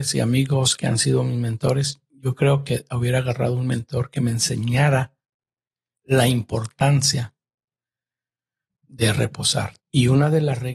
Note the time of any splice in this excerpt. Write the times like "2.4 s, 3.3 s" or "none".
9.8 s